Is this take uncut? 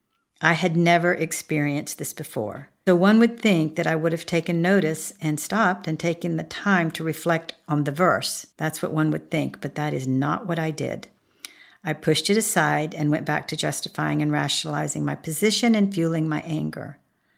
no; 2 cuts; at 2.9 s, 8.5 s

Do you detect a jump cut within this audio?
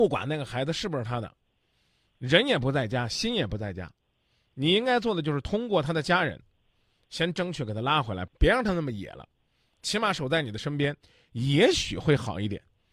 yes; 1 cut; at 8.3 s

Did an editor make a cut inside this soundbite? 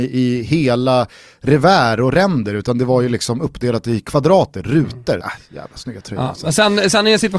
yes; 1 cut; at 5.2 s

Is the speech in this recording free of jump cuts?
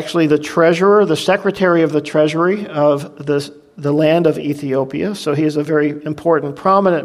yes; 0 cuts

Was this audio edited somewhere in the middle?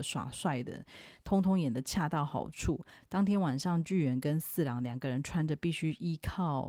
yes; 1 cut; at 3.0 s

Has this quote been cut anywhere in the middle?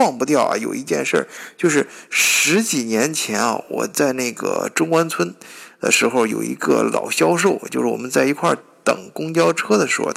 no; 0 cuts

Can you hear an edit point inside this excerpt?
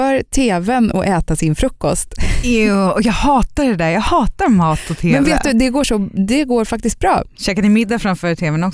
no; 0 cuts

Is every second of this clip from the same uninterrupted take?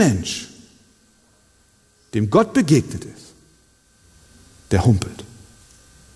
yes; 0 cuts

